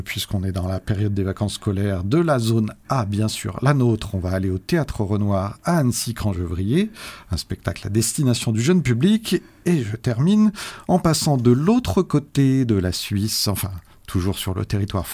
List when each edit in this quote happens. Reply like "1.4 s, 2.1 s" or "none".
none